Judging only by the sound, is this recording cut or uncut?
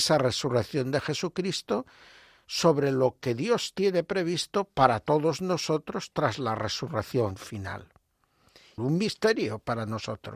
cut